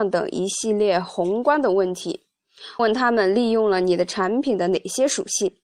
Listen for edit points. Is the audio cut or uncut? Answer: cut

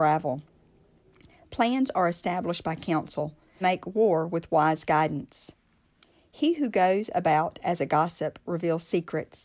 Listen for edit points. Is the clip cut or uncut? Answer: cut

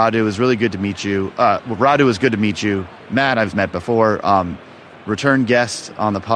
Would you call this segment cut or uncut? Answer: uncut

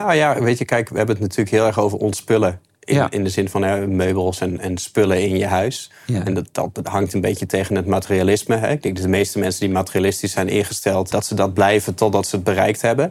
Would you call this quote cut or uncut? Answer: cut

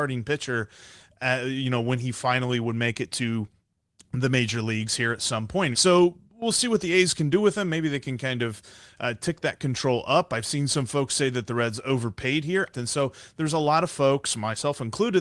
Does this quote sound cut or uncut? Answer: cut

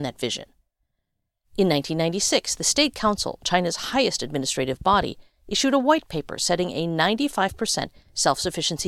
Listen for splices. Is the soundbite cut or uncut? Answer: cut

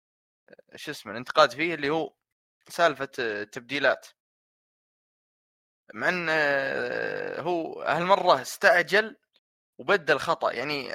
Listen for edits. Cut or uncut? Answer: uncut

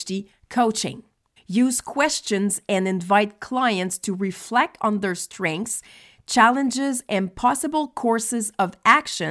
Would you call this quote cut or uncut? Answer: cut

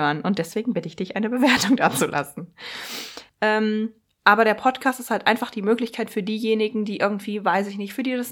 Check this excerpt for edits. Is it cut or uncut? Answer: cut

